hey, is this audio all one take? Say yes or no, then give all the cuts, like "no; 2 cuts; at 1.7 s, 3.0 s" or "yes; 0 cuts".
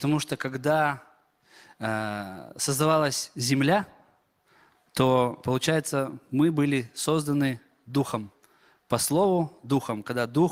yes; 0 cuts